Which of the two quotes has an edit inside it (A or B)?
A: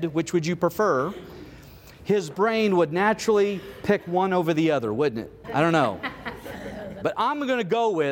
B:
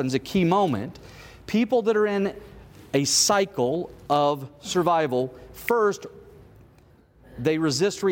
A